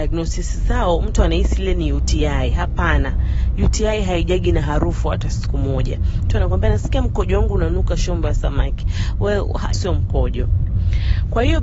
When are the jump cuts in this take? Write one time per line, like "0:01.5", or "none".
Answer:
0:09.7